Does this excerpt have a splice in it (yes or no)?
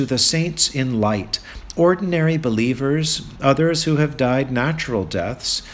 yes